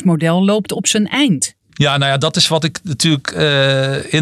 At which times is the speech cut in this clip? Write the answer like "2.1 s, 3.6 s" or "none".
1.6 s